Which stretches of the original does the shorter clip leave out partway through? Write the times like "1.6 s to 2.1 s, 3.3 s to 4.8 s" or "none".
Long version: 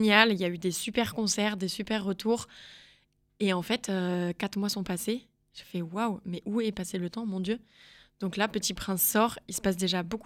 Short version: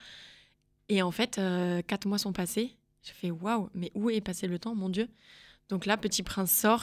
none